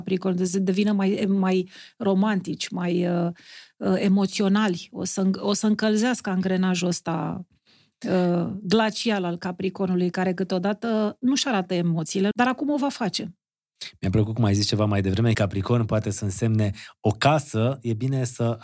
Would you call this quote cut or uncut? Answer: cut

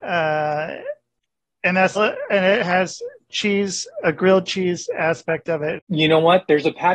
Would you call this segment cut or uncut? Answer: cut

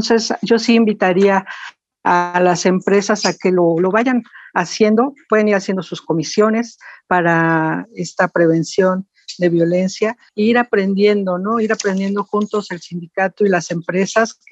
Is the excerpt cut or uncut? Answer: uncut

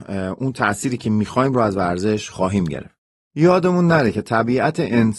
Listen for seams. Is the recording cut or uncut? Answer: uncut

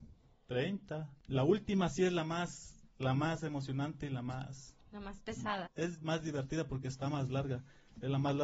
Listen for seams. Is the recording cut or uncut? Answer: cut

